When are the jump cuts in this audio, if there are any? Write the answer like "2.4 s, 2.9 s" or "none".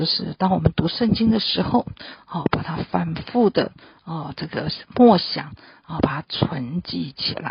none